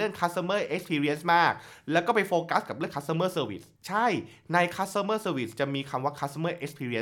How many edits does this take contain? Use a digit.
1